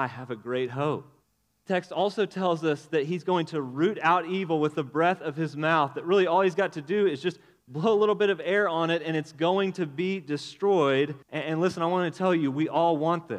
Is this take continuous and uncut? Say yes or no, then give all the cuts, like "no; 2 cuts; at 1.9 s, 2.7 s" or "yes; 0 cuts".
no; 2 cuts; at 1.5 s, 11.2 s